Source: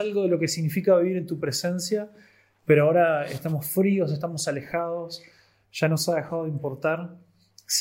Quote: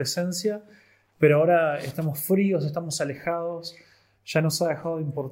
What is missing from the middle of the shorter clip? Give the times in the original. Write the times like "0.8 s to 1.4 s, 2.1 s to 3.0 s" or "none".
none